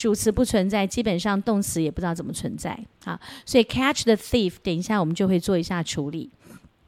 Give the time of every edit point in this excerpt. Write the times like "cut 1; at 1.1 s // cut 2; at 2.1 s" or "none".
none